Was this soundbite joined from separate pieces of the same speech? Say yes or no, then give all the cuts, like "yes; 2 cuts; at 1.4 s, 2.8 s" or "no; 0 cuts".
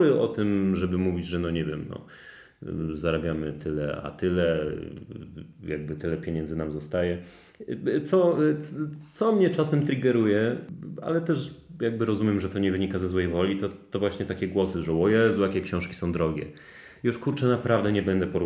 no; 0 cuts